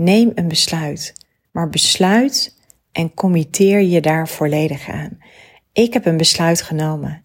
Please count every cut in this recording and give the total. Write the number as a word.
one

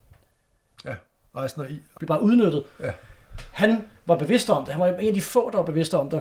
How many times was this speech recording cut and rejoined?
one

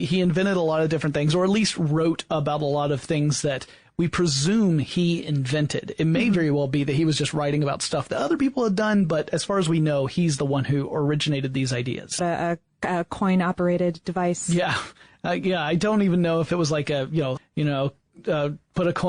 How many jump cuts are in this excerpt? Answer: two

